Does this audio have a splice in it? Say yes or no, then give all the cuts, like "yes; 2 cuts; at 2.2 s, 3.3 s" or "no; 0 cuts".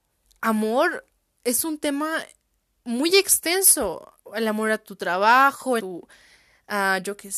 yes; 1 cut; at 5.8 s